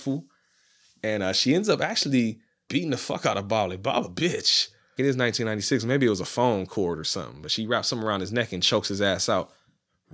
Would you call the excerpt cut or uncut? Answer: cut